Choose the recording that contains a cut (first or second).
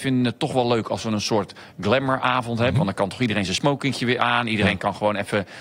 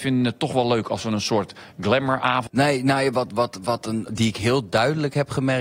second